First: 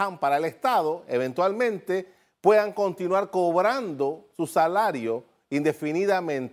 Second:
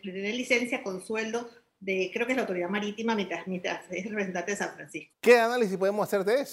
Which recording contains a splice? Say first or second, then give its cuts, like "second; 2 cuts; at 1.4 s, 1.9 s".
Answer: second; 1 cut; at 5.1 s